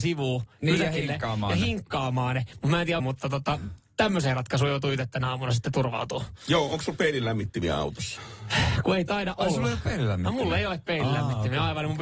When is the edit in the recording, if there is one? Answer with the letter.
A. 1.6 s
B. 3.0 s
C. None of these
B